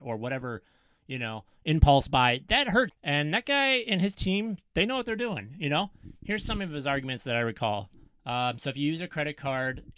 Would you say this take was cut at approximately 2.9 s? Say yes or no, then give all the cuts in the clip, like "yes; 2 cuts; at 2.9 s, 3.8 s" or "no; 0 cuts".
yes; 1 cut; at 2.9 s